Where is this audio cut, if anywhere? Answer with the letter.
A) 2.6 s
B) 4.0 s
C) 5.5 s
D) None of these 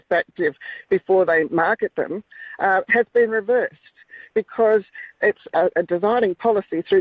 C